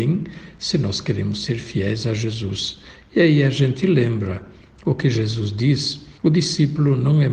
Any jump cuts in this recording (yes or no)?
yes